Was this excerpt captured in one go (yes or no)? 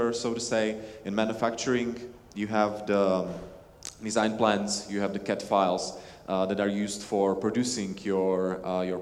yes